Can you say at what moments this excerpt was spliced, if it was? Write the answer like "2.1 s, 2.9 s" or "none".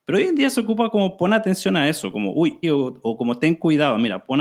2.6 s